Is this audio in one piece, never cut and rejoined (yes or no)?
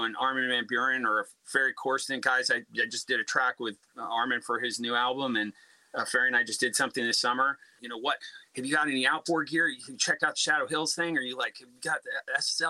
no